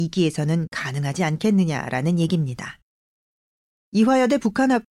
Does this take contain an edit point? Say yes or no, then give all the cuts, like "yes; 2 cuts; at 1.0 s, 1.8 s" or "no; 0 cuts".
no; 0 cuts